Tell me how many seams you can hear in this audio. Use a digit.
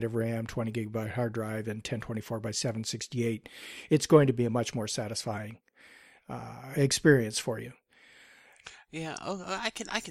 0